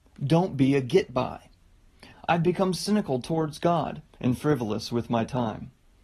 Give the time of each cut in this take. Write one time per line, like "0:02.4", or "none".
0:02.1
0:04.2